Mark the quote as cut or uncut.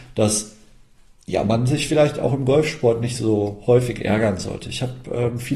uncut